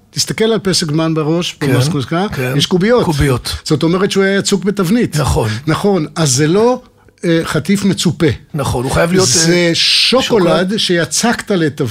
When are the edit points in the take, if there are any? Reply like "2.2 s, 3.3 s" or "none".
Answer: none